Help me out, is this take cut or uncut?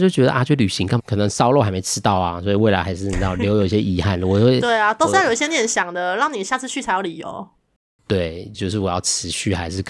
cut